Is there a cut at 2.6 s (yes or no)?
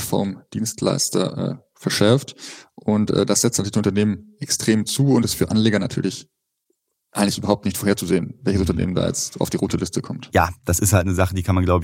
no